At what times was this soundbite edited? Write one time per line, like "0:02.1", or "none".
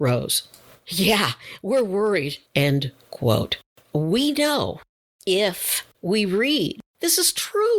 0:02.5
0:05.9